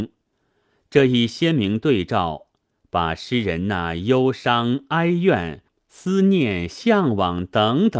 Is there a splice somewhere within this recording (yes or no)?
no